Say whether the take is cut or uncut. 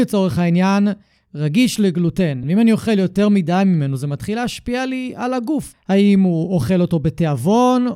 cut